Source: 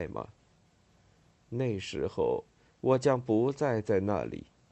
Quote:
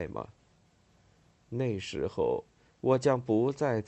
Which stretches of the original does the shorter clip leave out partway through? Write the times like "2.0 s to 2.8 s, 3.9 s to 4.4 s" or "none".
none